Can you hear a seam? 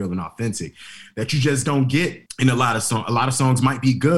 no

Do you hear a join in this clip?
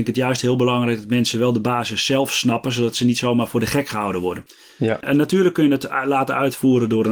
no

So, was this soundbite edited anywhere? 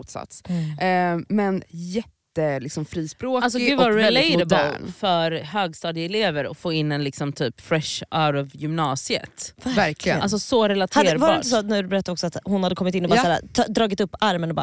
no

